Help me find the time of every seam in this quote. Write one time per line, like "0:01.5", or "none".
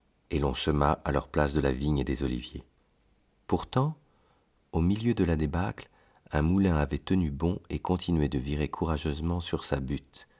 none